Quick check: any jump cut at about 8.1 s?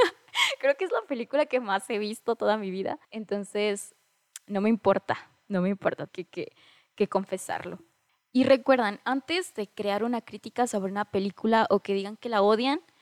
no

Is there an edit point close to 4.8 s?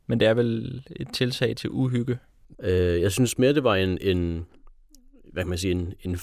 no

